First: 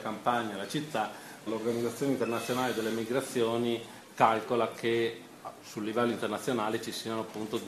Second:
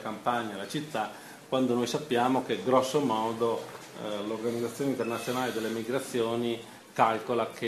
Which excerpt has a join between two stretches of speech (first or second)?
first